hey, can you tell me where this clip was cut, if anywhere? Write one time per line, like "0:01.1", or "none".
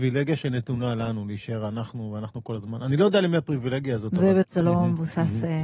0:04.4

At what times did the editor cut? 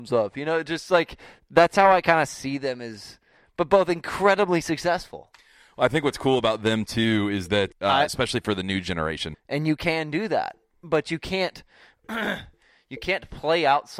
0:07.7
0:09.3

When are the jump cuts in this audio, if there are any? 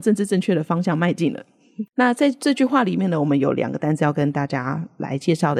0:01.9

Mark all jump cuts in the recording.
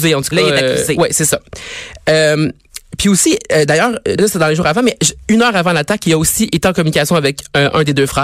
0:04.2

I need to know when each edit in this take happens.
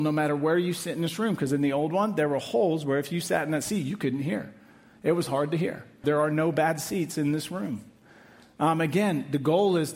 0:06.0

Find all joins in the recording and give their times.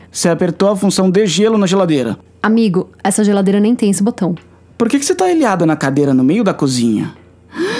none

